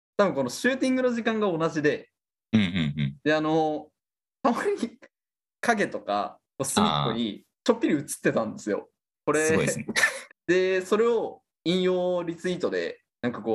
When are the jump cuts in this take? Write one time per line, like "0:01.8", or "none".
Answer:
0:09.1
0:10.3
0:11.5